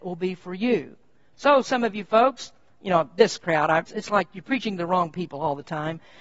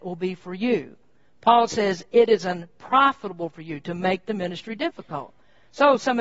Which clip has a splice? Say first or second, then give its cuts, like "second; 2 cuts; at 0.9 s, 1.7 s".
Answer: first; 2 cuts; at 1.3 s, 3.8 s